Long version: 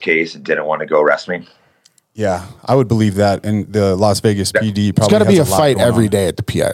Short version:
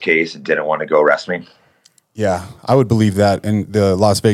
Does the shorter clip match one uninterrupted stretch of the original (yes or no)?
yes